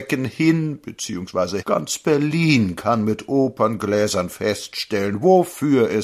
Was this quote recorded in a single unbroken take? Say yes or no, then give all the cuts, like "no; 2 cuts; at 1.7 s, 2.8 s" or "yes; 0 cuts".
no; 1 cut; at 1.6 s